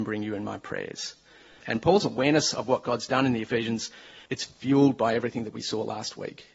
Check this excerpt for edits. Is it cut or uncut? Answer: cut